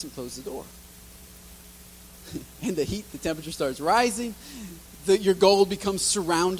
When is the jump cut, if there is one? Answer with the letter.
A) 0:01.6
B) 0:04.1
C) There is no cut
C